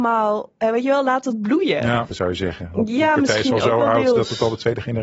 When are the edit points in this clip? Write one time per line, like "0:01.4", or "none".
0:02.1